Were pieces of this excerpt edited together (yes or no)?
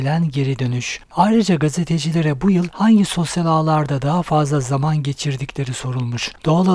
yes